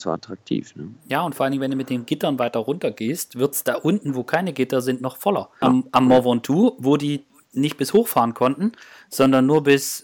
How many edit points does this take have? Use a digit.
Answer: 1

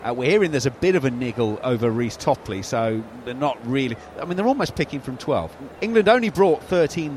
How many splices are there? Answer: 1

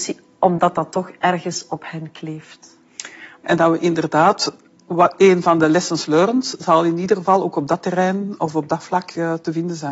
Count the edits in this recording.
1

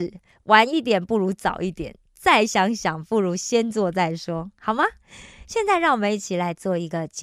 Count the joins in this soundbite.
0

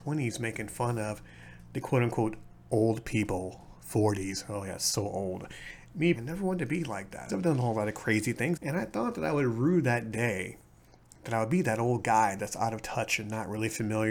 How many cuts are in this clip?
3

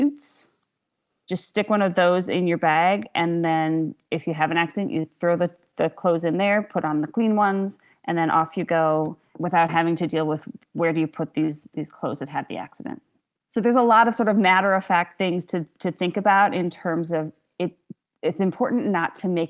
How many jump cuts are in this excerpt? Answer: 0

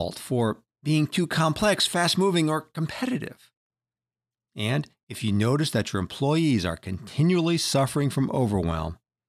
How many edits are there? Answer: 1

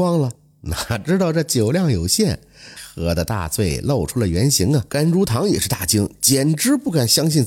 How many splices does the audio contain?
2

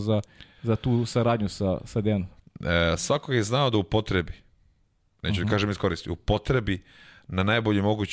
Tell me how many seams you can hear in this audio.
1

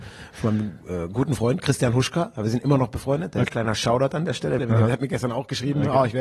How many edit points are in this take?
2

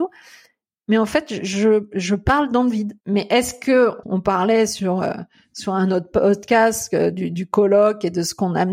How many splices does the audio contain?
2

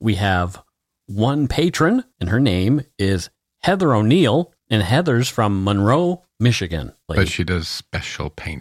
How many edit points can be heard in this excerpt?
2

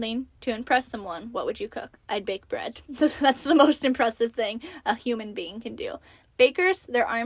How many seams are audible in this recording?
1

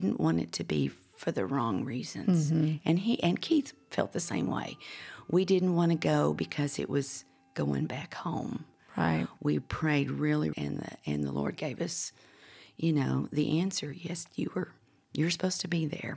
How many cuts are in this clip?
1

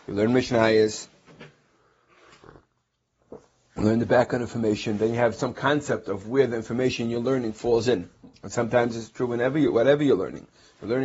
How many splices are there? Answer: 0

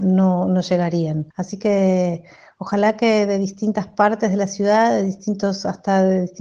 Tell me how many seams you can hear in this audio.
1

